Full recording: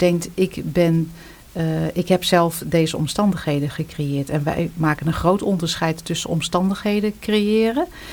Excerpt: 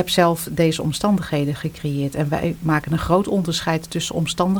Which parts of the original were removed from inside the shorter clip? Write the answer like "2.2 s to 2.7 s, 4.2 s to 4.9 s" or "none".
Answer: none